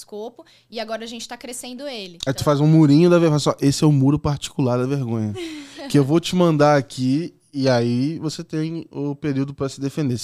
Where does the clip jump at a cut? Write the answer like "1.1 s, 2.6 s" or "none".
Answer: none